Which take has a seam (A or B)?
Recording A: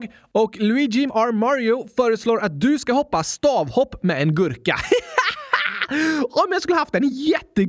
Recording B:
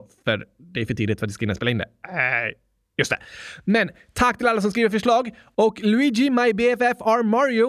A